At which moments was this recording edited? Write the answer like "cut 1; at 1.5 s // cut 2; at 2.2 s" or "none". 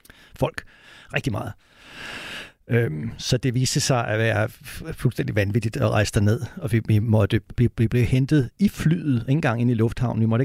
cut 1; at 7.6 s